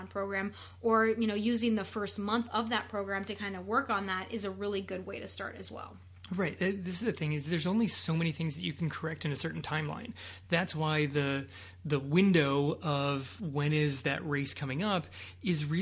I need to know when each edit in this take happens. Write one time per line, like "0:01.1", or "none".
none